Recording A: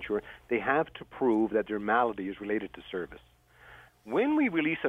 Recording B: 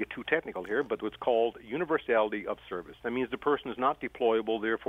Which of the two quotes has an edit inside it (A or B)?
A